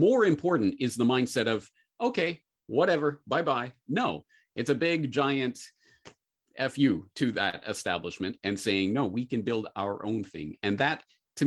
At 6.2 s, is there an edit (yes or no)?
no